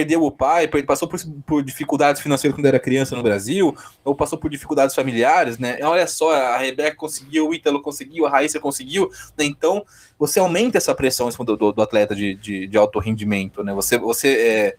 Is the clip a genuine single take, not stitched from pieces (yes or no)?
no